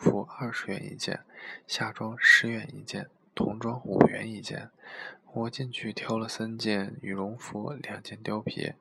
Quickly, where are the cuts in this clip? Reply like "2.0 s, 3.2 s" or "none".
none